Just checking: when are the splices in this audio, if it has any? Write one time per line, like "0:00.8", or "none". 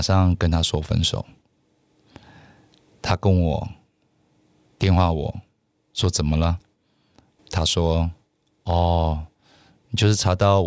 0:07.4